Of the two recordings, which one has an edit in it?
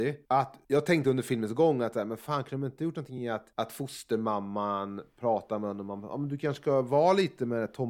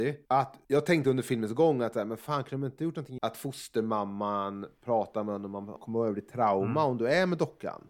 second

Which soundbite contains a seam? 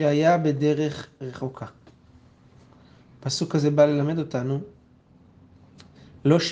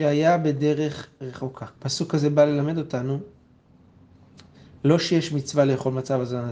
second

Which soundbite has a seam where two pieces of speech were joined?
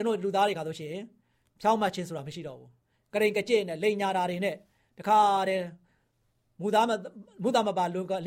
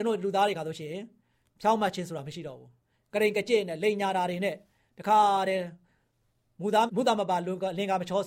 second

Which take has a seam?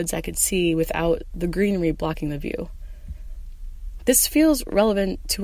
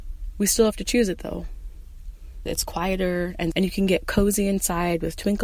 second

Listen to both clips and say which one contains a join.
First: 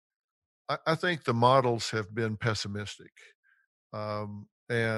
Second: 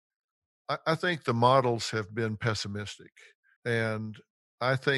second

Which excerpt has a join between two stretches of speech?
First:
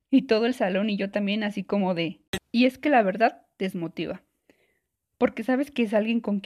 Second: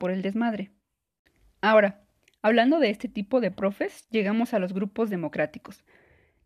first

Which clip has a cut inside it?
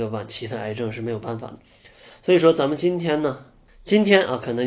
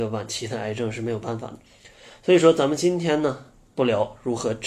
first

